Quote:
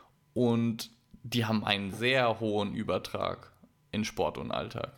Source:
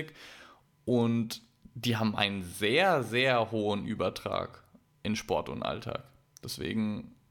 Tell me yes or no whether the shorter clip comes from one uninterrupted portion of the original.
no